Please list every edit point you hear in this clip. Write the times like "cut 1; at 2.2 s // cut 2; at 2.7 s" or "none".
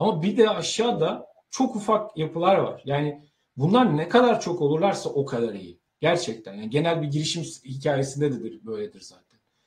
none